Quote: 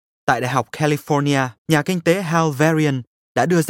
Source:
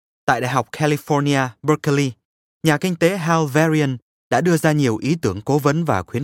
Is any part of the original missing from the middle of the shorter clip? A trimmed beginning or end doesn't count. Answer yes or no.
yes